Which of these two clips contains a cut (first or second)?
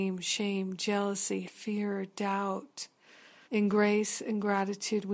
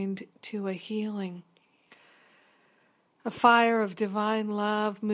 first